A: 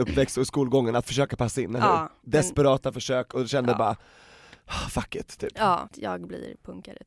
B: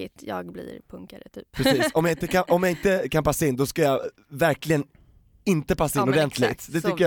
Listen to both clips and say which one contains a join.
A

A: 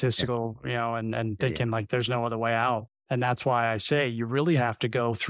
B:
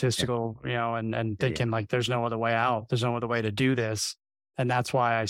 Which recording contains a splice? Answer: A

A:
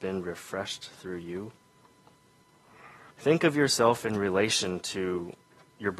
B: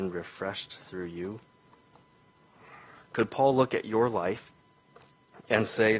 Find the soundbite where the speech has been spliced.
A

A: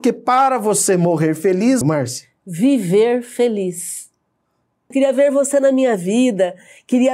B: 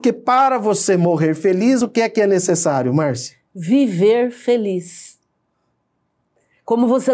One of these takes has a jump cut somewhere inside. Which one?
A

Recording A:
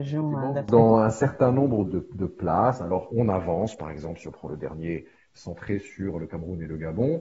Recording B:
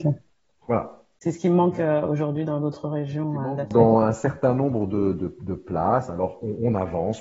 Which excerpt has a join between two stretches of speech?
A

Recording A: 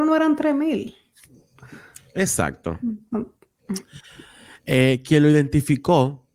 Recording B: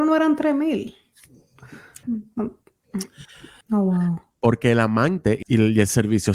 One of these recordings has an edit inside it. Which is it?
B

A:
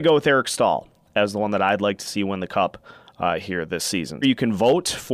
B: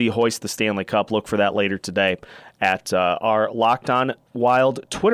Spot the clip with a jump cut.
A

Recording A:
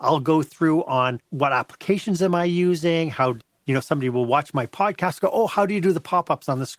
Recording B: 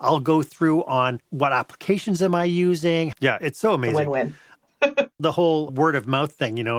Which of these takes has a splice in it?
B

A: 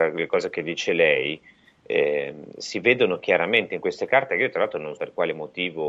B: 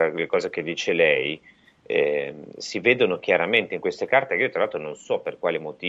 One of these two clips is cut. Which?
A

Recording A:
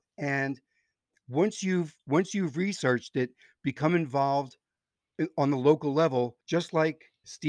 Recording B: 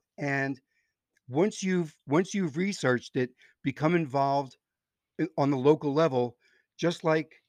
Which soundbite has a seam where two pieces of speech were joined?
A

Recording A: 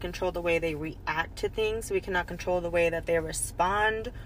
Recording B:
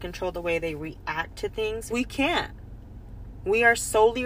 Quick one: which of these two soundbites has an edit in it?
B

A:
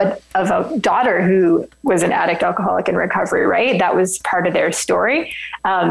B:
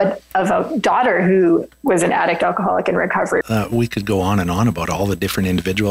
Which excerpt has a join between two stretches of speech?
B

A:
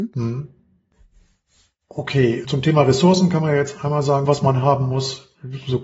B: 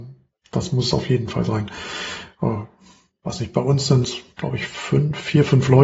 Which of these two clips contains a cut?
A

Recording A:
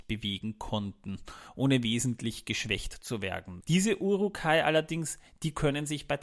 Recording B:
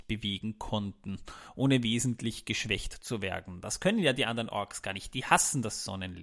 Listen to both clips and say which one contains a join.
A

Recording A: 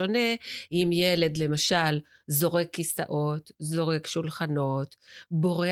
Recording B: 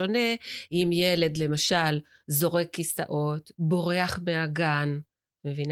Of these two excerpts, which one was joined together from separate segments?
B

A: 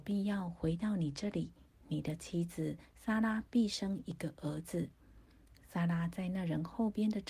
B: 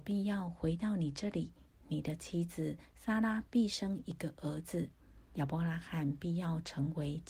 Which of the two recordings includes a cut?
B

